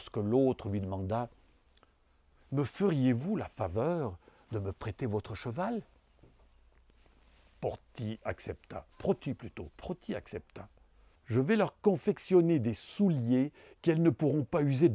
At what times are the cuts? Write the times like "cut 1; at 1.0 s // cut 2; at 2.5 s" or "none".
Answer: cut 1; at 8.9 s // cut 2; at 11.1 s